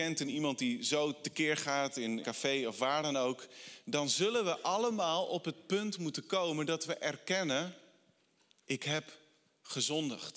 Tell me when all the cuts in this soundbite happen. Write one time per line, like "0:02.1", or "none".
0:02.2